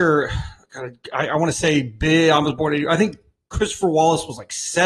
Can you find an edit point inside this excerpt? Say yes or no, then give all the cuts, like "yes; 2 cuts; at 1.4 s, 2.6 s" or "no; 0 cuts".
no; 0 cuts